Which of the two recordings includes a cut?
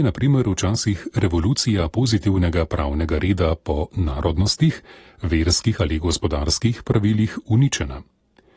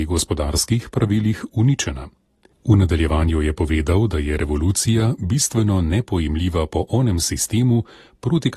second; 1 cut; at 2.5 s

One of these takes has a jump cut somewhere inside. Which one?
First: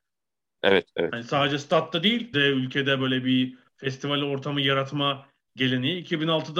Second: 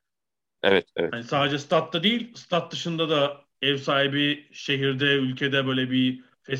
first; 1 cut; at 2.3 s

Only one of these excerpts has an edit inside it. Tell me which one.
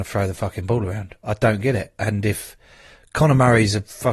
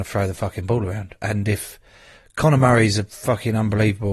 second; 1 cut; at 1.2 s

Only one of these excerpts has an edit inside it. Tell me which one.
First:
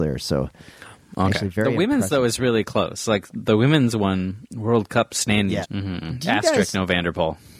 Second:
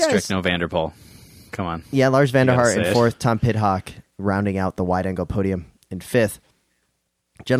first; 2 cuts; at 3.3 s, 5.6 s

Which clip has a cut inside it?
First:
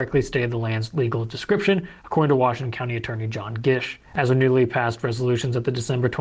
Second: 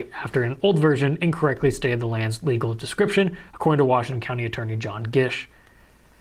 first; 1 cut; at 4.0 s

